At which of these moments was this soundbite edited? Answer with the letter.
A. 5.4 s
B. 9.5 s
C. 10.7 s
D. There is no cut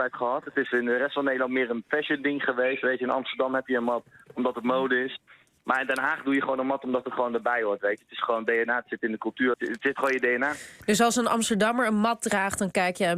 B